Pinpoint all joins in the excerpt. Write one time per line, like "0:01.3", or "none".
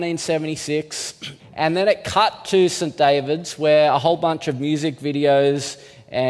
0:01.4